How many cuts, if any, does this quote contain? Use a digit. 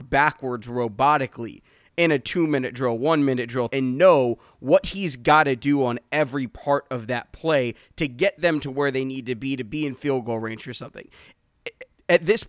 1